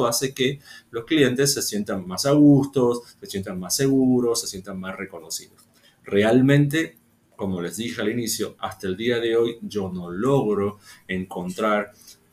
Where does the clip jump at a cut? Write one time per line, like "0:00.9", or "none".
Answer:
none